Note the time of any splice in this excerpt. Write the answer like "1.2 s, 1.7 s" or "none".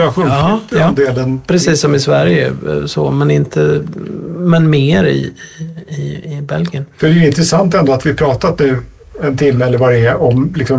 none